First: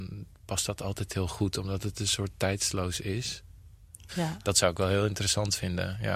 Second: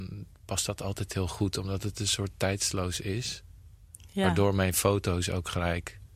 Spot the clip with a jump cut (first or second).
first